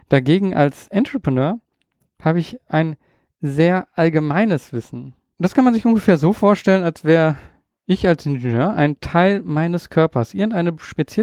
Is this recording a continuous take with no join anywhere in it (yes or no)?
yes